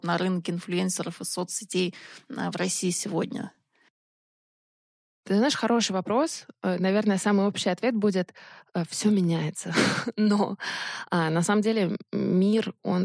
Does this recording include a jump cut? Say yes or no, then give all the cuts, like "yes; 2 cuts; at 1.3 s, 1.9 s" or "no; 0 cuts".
no; 0 cuts